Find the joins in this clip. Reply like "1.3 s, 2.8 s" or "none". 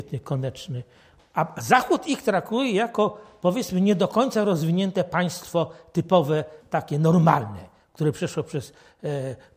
1.2 s